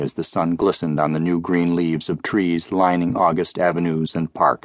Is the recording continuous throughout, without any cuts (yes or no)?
yes